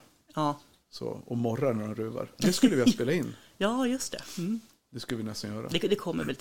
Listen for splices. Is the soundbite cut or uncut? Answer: uncut